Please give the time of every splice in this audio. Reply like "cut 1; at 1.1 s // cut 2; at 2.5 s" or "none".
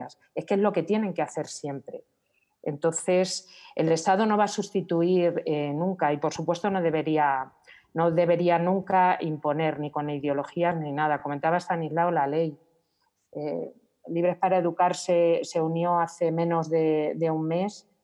none